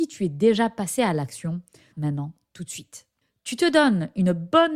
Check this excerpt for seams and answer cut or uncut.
cut